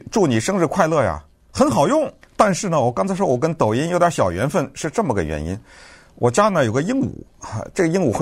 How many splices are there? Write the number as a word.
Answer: one